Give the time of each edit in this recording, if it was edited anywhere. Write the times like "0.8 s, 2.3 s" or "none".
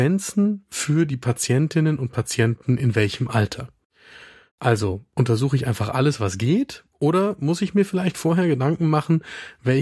none